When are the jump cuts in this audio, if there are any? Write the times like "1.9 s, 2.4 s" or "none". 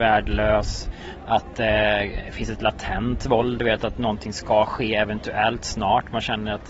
none

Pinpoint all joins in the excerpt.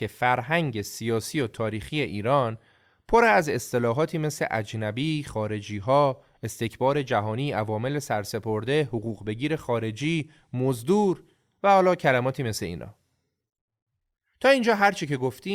none

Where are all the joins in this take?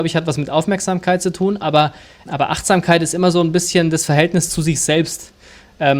2.3 s

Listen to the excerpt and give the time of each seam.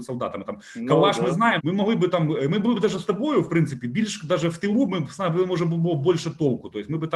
1.6 s

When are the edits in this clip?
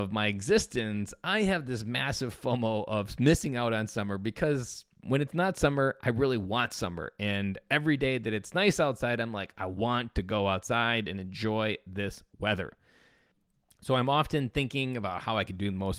none

